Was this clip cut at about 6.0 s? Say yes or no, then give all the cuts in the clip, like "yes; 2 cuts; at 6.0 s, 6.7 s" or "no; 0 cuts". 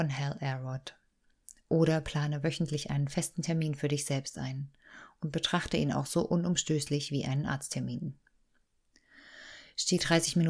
no; 0 cuts